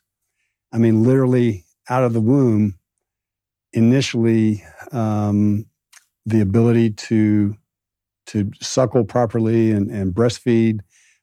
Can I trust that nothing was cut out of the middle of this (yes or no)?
yes